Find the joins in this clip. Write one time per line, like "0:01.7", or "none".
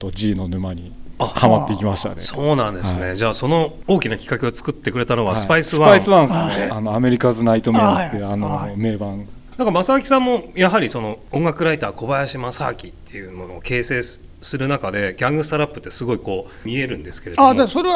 0:06.7